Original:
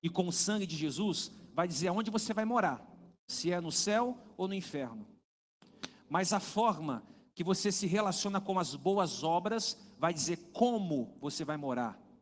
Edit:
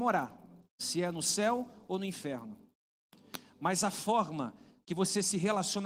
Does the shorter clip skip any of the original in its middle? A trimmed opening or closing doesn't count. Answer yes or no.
no